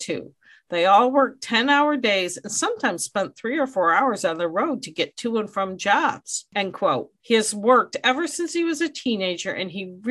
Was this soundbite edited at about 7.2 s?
yes; 1 cut; at 7.2 s

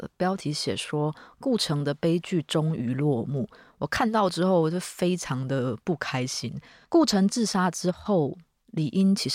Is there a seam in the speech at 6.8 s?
yes; 1 cut; at 6.8 s

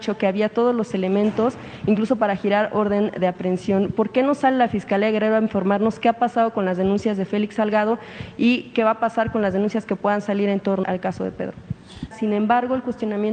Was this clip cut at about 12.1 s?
yes; 2 cuts; at 10.8 s, 12.1 s

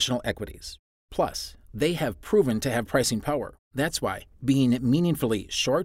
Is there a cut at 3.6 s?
yes; 2 cuts; at 1.0 s, 3.6 s

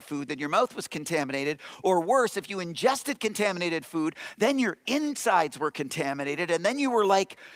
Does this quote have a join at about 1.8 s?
no; 0 cuts

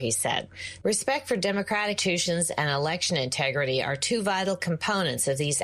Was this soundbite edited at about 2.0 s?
yes; 1 cut; at 2.0 s

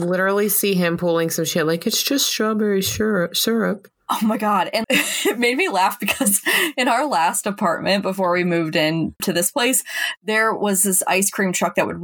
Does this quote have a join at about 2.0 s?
no; 2 cuts; at 4.8 s, 9.2 s

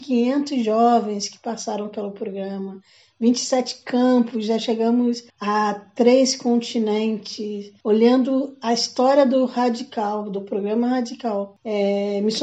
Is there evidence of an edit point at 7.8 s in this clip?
no; 1 cut; at 5.3 s

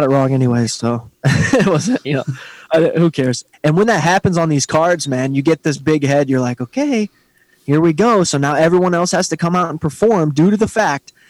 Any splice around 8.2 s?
no; 1 cut; at 3.5 s

